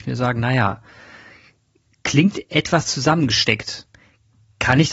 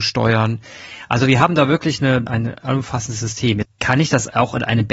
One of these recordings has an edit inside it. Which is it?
second; 2 cuts; at 2.3 s, 3.6 s

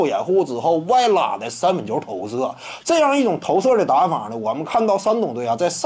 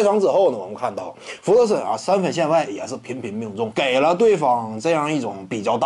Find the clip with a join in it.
second; 1 cut; at 3.7 s

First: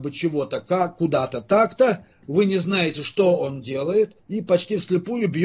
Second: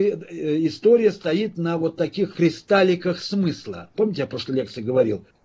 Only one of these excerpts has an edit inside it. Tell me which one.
second; 2 cuts; at 2.3 s, 3.9 s

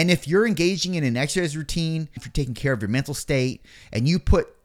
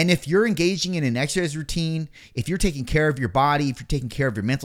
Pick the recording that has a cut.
first; 1 cut; at 2.2 s

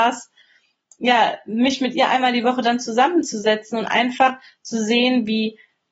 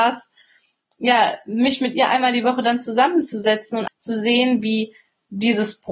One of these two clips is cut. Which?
second; 1 cut; at 3.9 s

